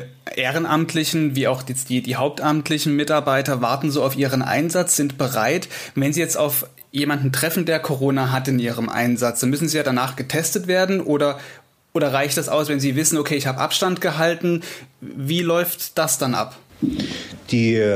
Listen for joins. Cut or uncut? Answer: uncut